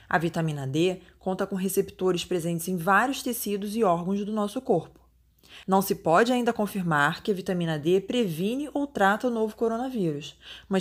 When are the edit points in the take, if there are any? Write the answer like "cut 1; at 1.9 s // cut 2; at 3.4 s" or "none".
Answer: cut 1; at 5.6 s